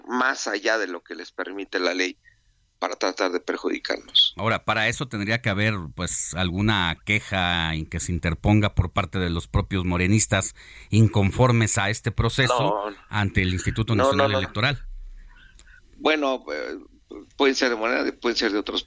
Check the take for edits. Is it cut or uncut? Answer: uncut